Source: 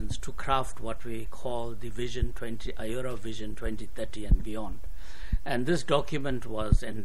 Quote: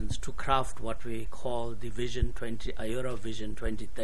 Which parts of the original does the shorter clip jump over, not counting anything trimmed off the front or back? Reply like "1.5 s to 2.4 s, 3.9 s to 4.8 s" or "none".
none